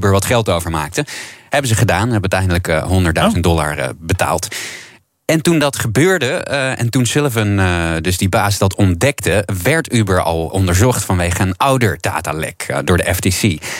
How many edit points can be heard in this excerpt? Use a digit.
1